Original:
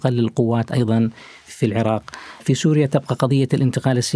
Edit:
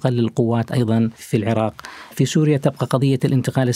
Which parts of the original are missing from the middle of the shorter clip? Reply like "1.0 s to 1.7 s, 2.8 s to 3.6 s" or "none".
1.2 s to 1.4 s

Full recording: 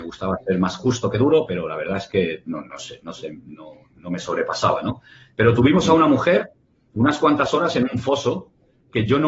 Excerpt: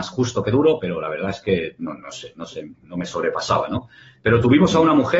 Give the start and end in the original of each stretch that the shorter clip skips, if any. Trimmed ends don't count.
3.4 s to 3.9 s

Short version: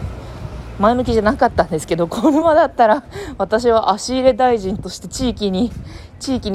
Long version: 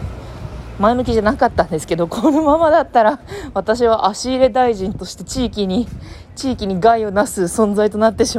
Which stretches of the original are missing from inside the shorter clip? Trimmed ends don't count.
2.4 s to 2.6 s

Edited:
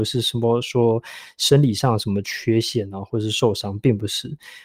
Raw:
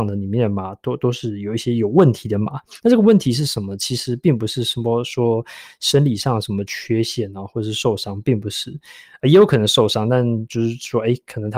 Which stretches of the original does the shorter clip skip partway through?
none

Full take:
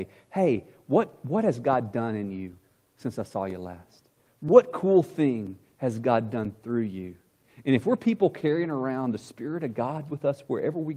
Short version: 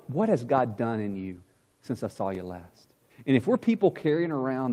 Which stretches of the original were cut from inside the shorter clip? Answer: 4.3 s to 7.5 s

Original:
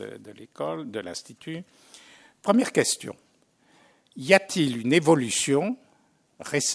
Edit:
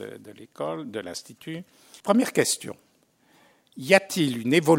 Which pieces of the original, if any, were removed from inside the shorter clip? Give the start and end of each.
2.0 s to 2.4 s

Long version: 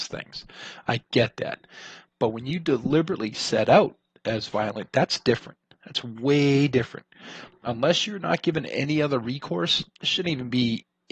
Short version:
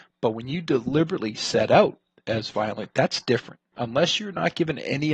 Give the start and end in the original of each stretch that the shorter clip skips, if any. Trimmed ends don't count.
5.7 s to 7.6 s

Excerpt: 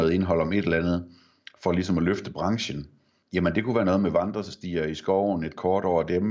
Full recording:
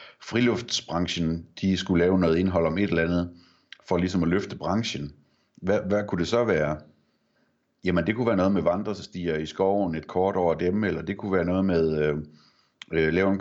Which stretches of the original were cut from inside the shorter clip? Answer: 5.5 s to 7.7 s

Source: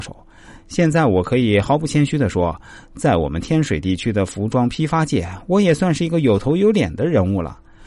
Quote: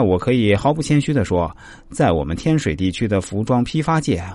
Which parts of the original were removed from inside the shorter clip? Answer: none

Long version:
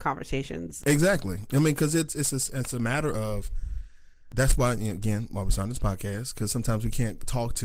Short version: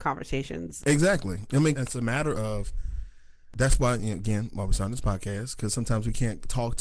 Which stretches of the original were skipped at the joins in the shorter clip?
1.7 s to 2.5 s

